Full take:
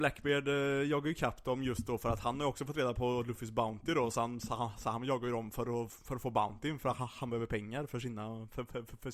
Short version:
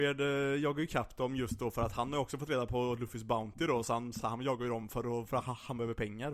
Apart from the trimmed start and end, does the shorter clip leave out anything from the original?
yes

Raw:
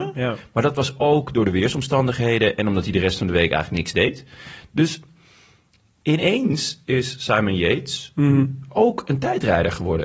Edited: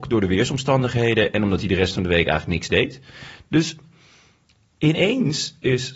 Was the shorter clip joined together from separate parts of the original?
no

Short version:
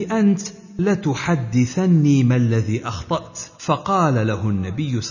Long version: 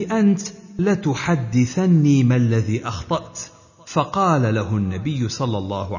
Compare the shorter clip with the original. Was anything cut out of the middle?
yes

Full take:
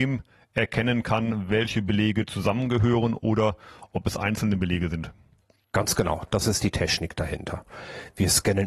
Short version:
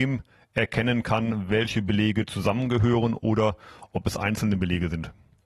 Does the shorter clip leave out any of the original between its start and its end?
no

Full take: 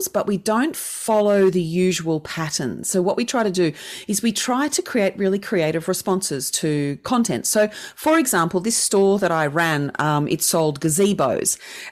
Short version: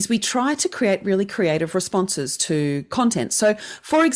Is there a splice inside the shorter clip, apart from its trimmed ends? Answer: no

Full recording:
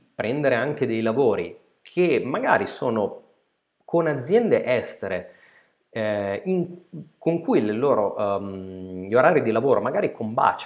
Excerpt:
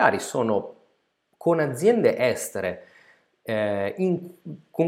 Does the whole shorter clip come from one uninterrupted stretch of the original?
yes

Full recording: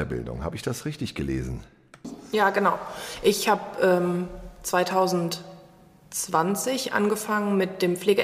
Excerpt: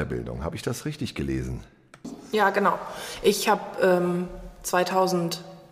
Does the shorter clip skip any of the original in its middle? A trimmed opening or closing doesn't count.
no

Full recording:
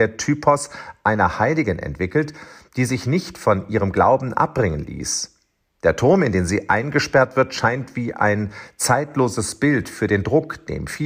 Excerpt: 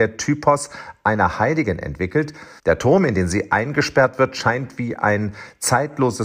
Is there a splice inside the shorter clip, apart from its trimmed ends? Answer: yes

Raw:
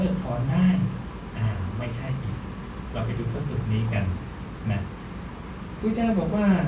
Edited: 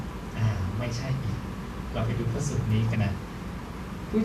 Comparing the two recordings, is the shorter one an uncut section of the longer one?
no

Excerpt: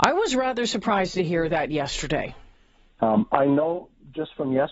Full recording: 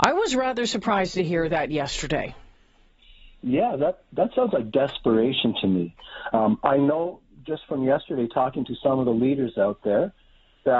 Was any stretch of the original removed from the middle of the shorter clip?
yes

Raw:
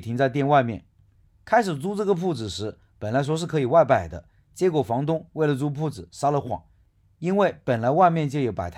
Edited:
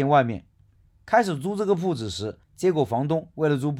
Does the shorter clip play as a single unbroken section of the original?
no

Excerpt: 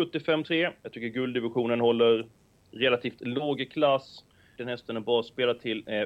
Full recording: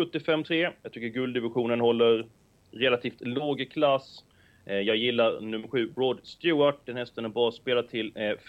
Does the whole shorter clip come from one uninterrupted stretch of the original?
no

